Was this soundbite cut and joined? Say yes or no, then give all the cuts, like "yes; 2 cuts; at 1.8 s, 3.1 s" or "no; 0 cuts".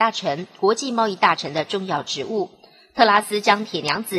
no; 0 cuts